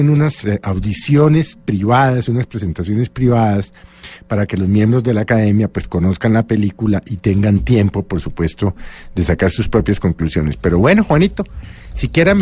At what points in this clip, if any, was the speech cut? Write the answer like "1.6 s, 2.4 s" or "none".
none